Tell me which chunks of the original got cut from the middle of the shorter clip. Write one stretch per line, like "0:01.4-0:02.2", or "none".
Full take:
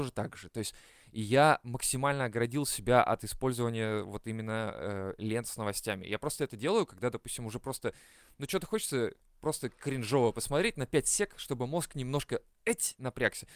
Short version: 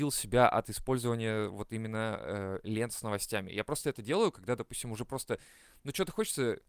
none